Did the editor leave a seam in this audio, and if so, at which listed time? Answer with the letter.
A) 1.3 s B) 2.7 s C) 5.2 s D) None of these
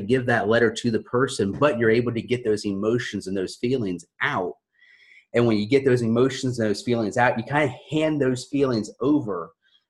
D